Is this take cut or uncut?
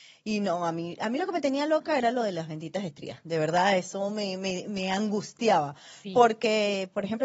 uncut